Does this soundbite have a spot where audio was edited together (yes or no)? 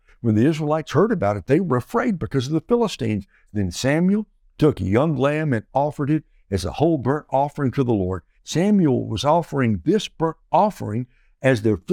yes